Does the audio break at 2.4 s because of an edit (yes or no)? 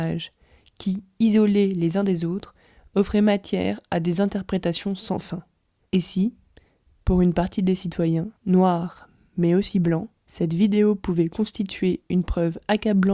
no